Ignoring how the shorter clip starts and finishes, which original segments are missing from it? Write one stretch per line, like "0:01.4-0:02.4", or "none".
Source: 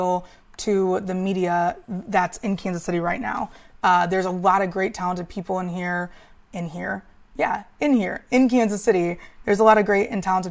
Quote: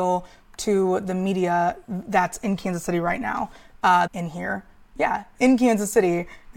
0:04.1-0:06.5
0:07.7-0:08.3